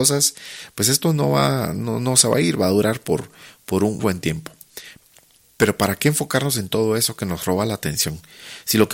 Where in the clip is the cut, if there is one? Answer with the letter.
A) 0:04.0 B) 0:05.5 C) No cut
A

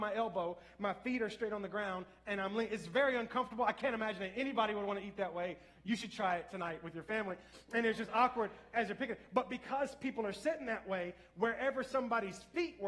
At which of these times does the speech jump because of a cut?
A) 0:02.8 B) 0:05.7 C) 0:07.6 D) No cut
D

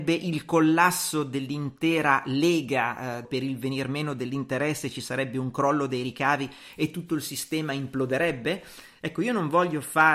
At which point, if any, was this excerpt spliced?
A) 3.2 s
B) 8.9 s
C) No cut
A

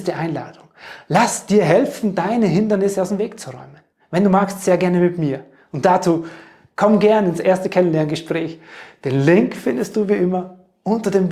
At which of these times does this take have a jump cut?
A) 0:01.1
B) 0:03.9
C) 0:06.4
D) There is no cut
D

